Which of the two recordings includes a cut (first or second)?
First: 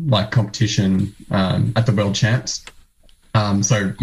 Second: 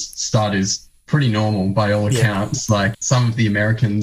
second